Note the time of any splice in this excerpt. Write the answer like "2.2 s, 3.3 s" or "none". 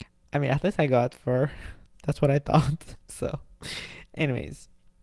3.0 s